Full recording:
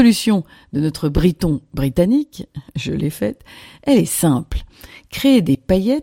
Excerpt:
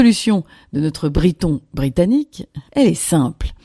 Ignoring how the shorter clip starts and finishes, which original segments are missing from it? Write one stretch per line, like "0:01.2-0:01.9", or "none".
0:02.7-0:03.8